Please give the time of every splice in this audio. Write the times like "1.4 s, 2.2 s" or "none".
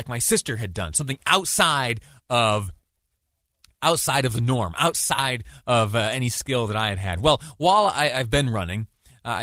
none